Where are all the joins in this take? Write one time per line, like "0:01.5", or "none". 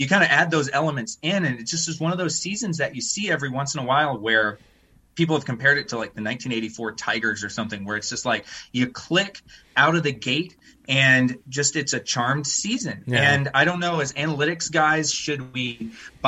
none